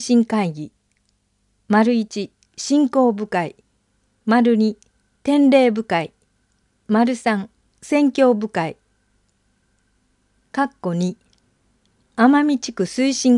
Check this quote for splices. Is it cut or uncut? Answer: uncut